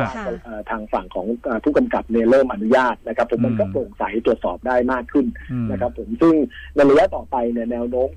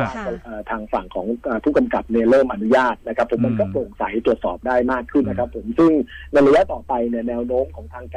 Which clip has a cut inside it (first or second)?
second